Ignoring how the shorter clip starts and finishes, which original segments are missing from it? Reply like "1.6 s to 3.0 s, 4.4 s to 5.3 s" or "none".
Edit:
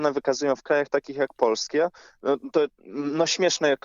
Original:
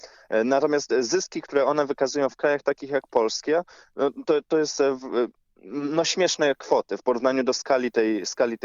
4.4 s to 5.5 s

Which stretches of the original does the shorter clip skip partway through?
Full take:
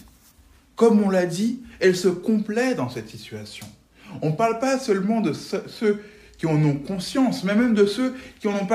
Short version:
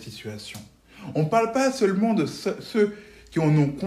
none

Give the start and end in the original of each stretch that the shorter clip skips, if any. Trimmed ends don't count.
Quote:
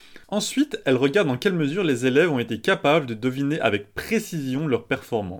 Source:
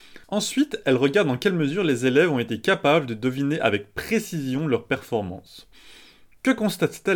none

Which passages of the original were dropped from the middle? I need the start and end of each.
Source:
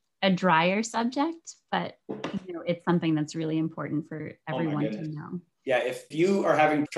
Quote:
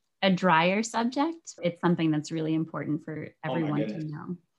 1.6 s to 2.6 s

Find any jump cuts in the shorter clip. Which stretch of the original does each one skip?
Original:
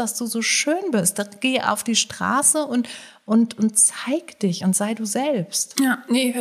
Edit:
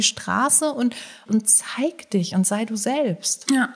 3.2 s to 3.6 s

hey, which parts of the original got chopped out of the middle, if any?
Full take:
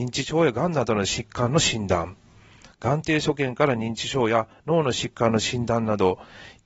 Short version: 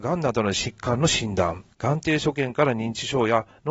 2.2 s to 2.7 s

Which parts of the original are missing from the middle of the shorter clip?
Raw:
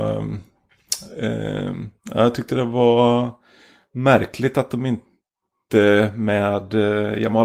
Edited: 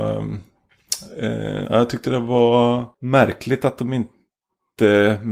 1.6 s to 2.1 s, 3.4 s to 3.9 s

